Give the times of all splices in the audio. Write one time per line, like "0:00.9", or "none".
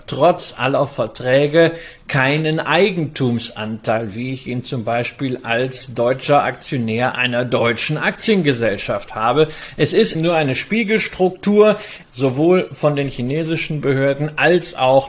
0:10.1
0:12.0